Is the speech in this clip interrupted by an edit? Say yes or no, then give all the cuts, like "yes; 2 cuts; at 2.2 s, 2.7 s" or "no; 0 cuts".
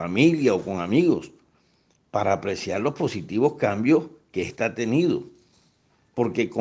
no; 0 cuts